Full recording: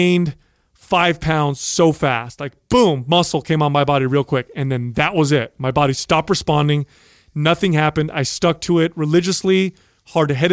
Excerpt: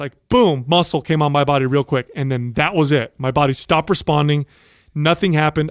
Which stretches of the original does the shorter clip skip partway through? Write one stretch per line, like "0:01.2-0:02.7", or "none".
none